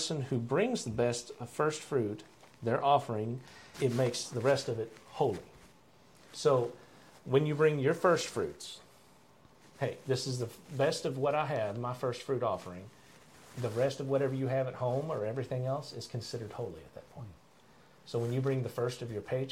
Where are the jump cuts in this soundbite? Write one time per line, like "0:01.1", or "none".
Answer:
0:03.7